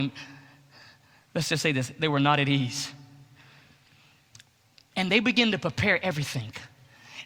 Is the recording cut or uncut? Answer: uncut